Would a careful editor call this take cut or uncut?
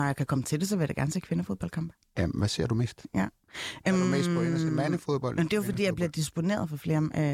uncut